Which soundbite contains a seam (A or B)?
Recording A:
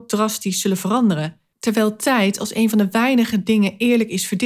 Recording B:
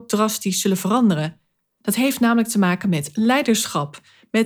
A